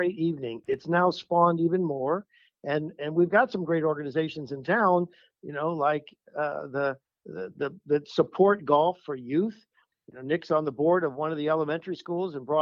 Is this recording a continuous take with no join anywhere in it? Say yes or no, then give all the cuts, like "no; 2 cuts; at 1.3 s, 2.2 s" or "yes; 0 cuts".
no; 1 cut; at 9.9 s